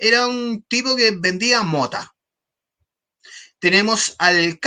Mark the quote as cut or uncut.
uncut